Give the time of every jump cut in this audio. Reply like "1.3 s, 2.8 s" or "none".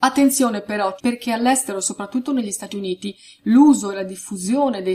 1.0 s